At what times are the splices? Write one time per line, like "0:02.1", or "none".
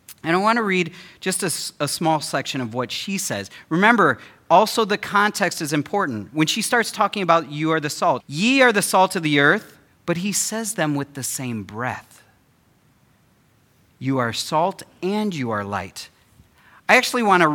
0:08.2
0:09.9